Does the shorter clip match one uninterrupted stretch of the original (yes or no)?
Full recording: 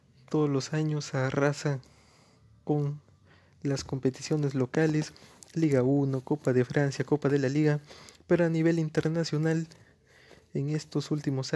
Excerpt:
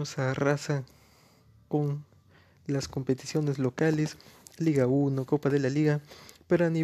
no